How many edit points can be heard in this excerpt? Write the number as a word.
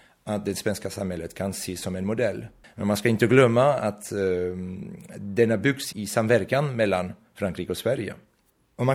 two